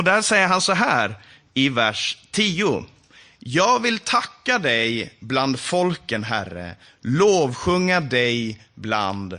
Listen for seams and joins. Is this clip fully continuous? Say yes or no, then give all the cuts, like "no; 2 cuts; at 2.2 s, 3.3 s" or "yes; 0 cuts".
yes; 0 cuts